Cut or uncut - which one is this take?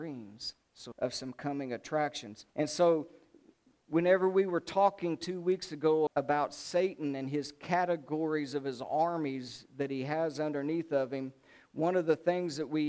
cut